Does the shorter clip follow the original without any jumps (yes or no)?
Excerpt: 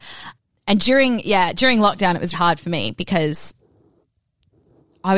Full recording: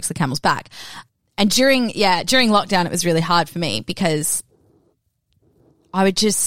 no